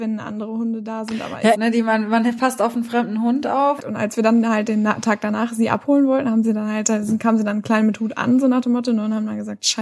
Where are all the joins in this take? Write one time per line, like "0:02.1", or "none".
0:01.5
0:03.8